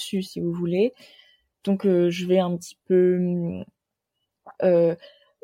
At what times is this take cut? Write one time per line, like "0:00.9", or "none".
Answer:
0:04.5